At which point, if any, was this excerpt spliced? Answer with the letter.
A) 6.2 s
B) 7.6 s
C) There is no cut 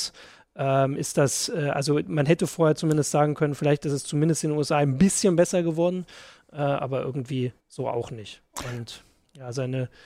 B